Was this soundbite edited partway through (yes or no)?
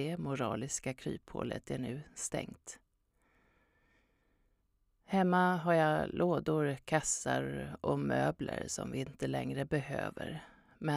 no